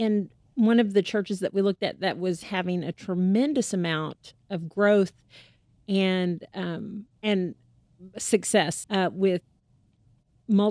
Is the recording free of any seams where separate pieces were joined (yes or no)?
no